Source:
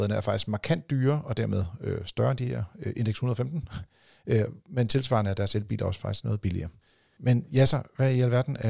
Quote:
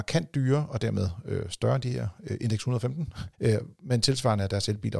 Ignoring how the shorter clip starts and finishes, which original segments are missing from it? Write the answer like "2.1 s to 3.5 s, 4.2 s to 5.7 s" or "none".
3.9 s to 4.2 s